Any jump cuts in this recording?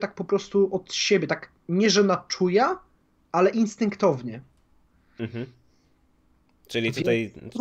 no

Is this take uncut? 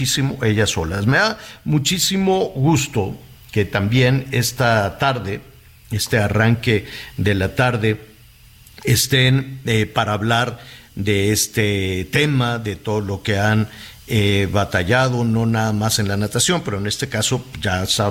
yes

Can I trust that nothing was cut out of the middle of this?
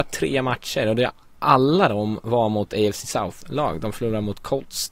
yes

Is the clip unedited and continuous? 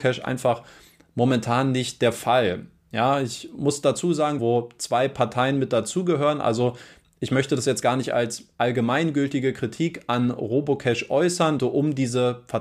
no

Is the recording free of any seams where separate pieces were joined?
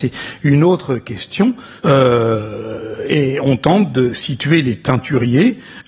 no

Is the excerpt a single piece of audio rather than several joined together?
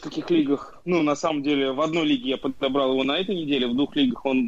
yes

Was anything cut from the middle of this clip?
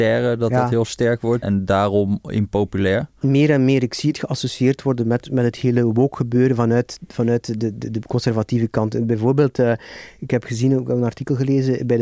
yes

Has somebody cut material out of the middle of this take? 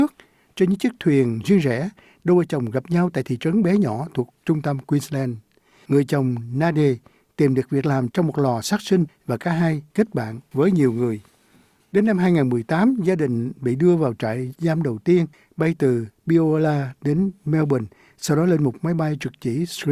no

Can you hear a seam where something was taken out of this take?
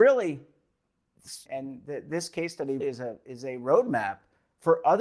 yes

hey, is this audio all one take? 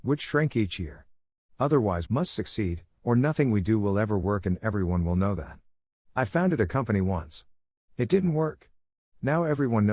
no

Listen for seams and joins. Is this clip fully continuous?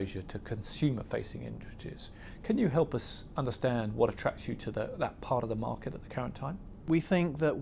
yes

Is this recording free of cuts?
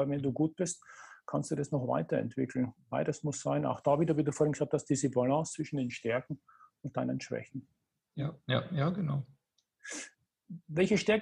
yes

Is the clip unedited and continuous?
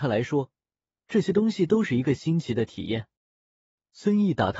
yes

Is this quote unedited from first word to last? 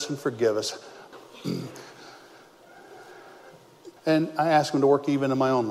no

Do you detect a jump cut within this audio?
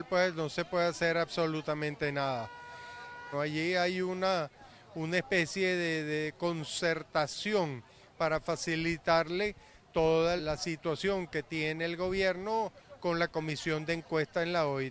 yes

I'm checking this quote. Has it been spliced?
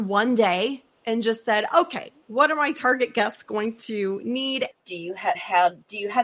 yes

